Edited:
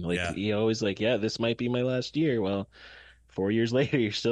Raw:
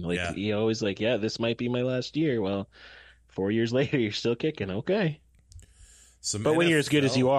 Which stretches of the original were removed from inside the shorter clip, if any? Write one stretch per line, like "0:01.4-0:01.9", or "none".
none

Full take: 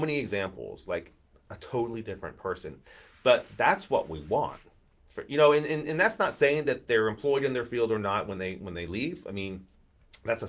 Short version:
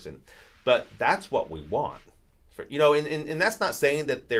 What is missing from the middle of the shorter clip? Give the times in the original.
none

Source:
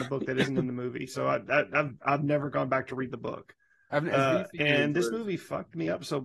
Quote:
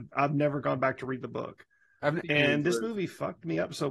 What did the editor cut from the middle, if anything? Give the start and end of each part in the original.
0:04.1-0:04.5

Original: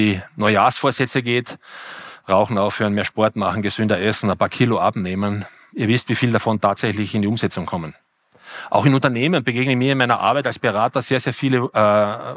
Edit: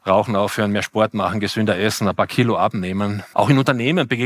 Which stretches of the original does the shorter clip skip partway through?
0:05.6-0:08.7

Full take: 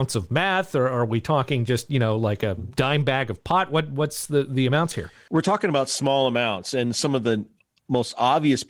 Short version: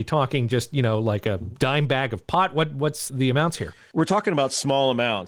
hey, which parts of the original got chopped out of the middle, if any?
0:04.3-0:04.5

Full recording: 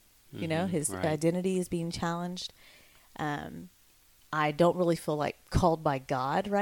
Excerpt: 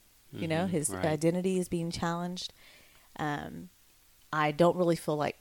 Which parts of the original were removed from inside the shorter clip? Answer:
none

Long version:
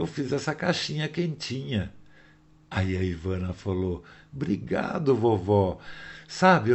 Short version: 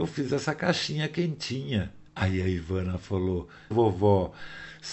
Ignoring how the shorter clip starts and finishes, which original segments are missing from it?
0:02.1-0:02.6
0:04.3-0:05.2

